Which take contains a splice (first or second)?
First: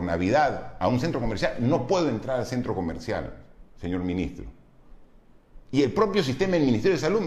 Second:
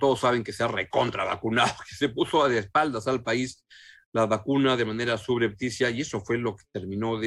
first